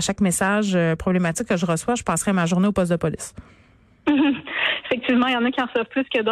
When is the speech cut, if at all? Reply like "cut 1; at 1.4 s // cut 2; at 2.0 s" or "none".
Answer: none